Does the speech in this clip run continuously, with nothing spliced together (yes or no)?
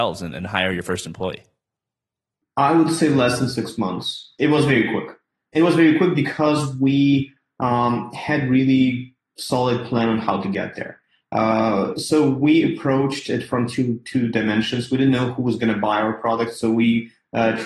yes